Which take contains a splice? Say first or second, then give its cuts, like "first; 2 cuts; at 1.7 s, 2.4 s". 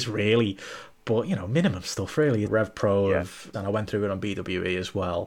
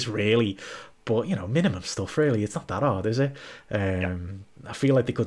first; 2 cuts; at 2.4 s, 3.5 s